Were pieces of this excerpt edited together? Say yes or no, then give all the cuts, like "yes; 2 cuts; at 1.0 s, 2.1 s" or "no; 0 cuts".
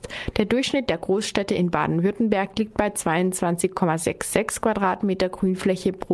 no; 0 cuts